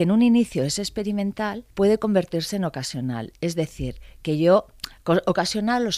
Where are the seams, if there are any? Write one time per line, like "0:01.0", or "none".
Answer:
0:01.7